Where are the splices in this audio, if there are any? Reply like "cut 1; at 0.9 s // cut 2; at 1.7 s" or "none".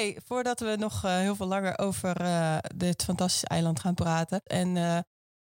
cut 1; at 4.5 s